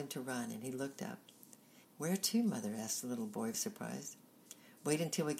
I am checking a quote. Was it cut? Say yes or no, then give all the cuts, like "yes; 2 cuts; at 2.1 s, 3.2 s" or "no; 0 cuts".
yes; 2 cuts; at 1.8 s, 3.5 s